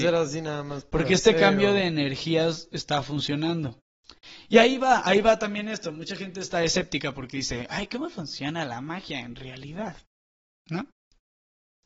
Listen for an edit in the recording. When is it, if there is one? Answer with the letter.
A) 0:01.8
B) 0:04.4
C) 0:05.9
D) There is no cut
D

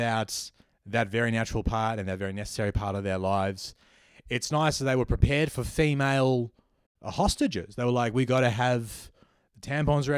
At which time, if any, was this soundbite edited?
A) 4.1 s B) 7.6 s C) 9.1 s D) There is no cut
D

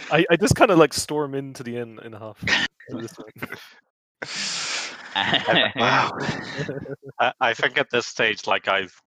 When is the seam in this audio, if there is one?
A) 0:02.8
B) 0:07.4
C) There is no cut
C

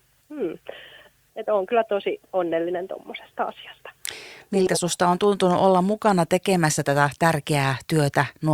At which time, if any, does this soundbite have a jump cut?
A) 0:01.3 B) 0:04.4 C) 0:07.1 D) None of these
A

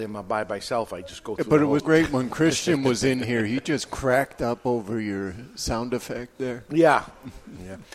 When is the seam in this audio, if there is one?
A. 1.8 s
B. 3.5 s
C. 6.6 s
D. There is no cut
A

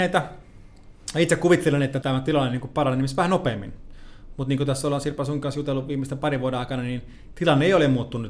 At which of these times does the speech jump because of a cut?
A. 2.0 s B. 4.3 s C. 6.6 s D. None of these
A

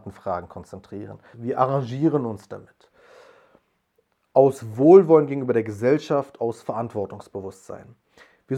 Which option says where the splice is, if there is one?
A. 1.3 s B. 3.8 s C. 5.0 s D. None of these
A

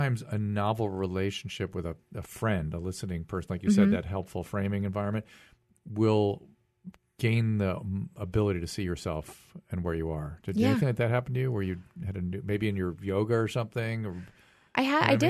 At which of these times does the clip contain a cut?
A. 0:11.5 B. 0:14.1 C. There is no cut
C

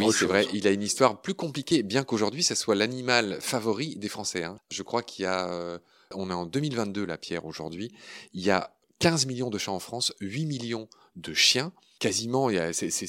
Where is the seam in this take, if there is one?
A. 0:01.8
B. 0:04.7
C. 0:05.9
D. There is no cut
D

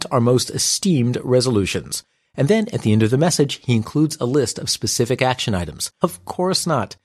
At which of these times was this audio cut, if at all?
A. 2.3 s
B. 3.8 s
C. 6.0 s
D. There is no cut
C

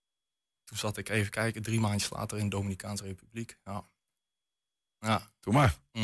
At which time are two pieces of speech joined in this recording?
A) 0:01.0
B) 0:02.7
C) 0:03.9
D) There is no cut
D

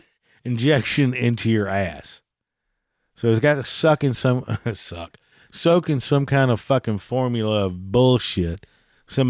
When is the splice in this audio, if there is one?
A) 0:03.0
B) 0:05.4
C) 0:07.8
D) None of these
D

